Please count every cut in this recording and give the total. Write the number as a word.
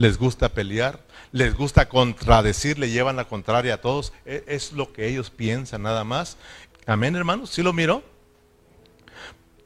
one